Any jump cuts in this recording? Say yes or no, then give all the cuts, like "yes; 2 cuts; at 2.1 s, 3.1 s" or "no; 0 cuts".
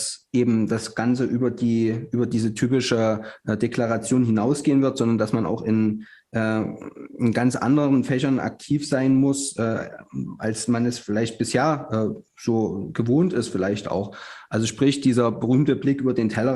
no; 0 cuts